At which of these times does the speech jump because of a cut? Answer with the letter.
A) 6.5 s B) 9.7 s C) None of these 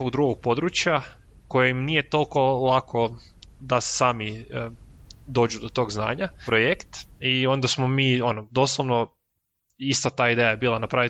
A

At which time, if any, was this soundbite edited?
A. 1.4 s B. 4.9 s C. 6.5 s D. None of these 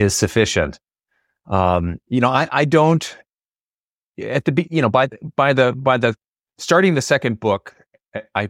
D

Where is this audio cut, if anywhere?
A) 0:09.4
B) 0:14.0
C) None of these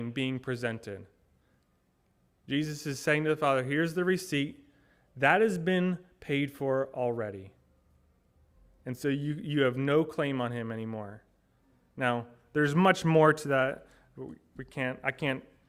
C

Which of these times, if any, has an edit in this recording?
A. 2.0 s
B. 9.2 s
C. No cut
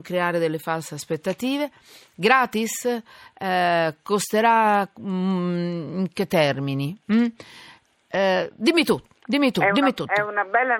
C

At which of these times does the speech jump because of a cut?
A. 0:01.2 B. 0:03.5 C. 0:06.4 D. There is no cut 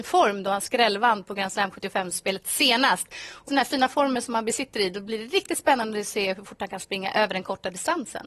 B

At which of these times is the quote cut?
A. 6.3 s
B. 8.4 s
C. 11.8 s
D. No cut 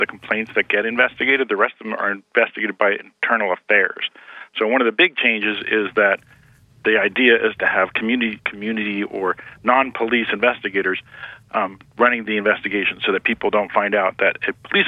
B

